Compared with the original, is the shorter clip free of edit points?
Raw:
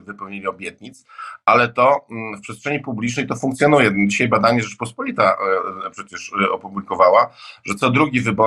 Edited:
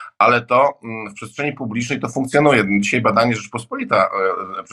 yes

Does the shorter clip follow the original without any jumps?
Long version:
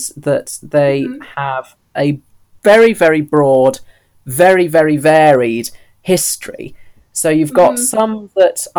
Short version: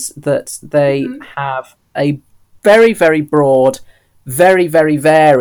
yes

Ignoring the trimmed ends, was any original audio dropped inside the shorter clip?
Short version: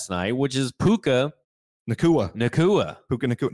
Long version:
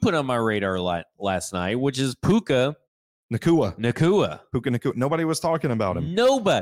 no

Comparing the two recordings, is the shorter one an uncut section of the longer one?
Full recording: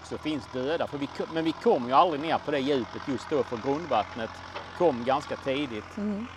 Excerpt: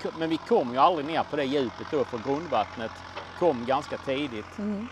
no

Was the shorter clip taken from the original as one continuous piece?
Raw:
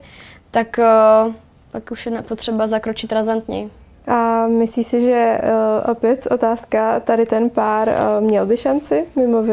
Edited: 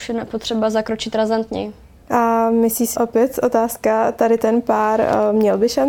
no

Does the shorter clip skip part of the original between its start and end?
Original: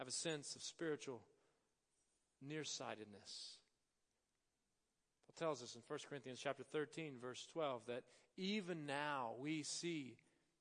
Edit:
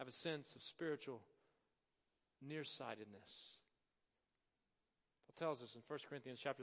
no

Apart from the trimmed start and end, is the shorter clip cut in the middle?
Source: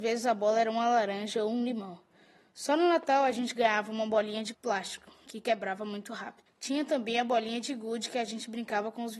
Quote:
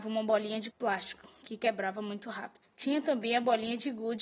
no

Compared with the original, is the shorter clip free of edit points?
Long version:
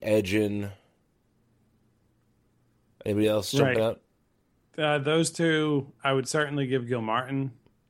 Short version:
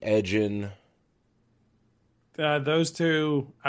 no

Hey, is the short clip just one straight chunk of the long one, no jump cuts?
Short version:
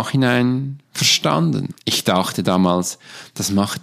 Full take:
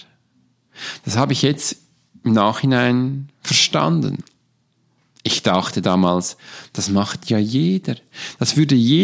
no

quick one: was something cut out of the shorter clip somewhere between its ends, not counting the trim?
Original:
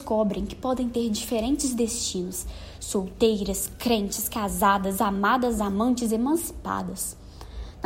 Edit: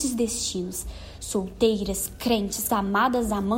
yes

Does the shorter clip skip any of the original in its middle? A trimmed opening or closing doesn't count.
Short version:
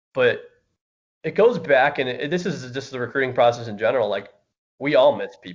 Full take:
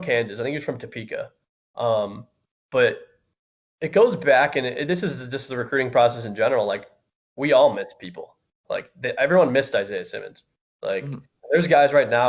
no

